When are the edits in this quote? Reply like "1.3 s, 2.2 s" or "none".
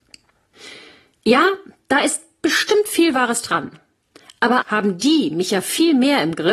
4.6 s